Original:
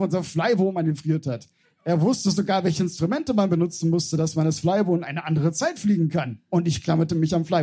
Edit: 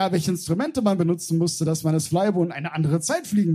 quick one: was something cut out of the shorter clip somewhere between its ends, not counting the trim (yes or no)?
no